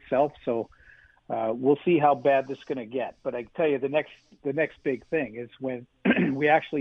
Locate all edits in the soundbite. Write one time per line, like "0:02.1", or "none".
none